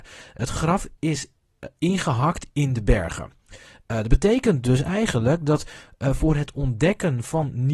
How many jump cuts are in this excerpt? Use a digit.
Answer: 0